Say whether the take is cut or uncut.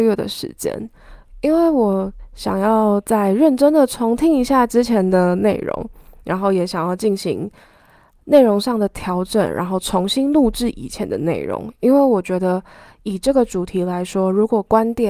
uncut